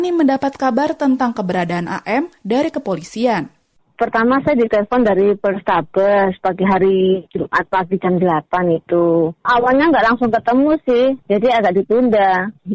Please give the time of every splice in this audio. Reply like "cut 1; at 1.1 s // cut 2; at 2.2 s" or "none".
cut 1; at 11.2 s